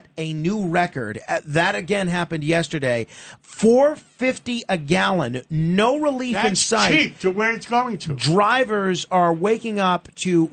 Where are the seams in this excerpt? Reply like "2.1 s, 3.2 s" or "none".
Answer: none